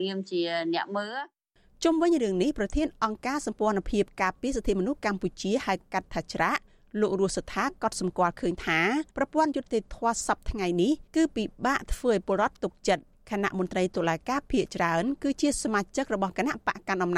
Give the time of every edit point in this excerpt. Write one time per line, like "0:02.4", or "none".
0:09.1
0:11.1